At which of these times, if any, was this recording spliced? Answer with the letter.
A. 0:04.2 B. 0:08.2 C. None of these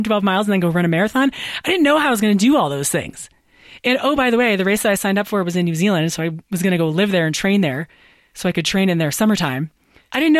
C